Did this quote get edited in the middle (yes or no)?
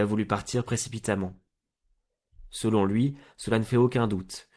no